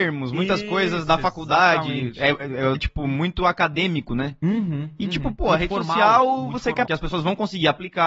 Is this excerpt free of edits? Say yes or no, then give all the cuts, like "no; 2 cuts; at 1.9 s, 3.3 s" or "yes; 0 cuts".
no; 2 cuts; at 2.7 s, 6.9 s